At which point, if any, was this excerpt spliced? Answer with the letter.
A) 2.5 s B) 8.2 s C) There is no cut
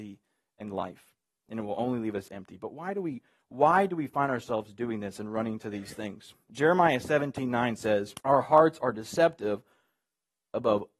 B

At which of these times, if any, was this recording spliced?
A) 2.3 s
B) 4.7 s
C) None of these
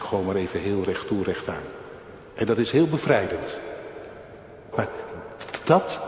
B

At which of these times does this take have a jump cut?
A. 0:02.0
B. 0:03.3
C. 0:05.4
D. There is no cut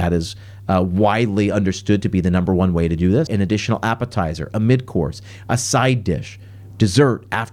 B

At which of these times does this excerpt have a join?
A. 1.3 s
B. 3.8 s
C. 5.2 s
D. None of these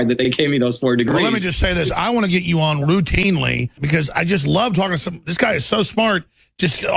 B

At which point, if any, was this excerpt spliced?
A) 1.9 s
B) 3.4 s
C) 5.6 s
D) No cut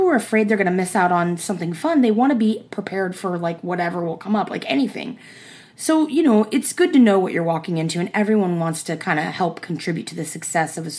C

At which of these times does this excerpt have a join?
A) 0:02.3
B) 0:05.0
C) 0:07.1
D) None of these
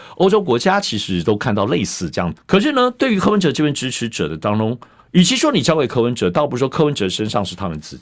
A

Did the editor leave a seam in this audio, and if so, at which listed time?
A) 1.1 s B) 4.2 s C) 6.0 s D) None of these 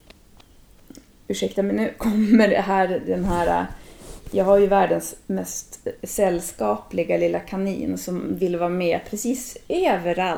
C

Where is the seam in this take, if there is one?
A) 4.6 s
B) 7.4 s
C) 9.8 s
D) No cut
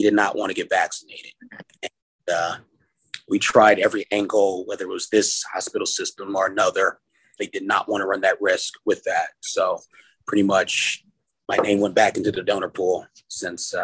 B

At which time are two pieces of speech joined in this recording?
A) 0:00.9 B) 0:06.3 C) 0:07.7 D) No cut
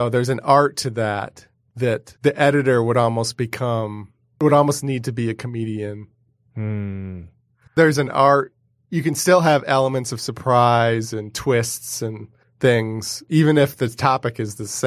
C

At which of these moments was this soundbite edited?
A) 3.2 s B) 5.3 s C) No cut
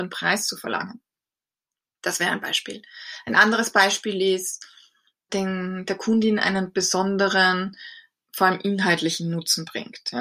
B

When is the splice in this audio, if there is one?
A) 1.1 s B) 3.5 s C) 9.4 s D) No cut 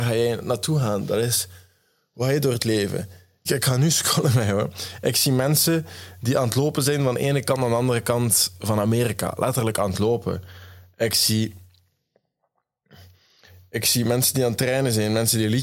B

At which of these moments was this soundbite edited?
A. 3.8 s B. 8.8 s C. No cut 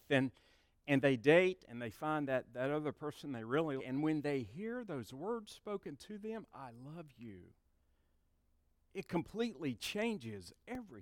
A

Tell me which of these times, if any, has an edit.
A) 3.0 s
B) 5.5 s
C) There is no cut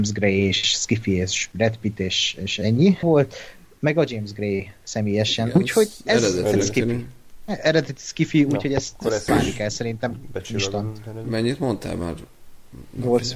A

